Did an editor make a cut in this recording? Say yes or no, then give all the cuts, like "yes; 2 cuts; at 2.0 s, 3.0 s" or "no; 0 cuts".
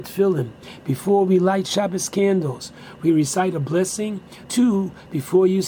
yes; 1 cut; at 4.4 s